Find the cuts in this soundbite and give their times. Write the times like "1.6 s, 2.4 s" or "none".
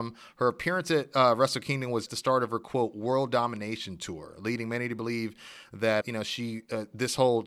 2.1 s, 6.0 s